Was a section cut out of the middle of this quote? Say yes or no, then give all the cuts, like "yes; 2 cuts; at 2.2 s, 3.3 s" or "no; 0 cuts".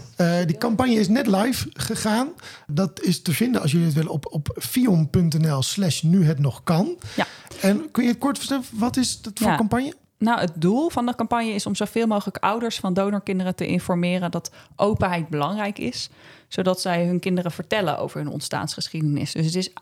yes; 1 cut; at 4.6 s